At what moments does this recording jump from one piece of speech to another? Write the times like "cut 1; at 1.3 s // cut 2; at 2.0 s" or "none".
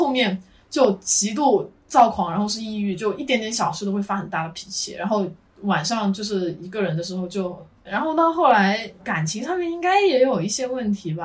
cut 1; at 7.8 s // cut 2; at 9.0 s